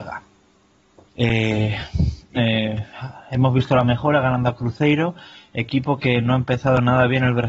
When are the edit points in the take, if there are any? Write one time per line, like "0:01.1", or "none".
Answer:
0:01.1
0:02.4